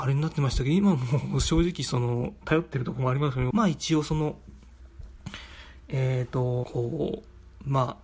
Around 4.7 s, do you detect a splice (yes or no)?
no